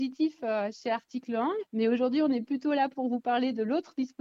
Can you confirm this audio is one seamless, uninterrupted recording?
no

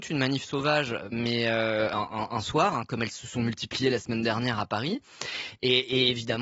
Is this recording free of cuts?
yes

